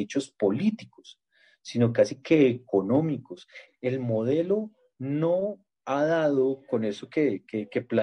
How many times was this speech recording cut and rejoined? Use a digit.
1